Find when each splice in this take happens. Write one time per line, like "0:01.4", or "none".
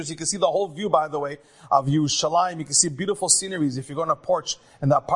none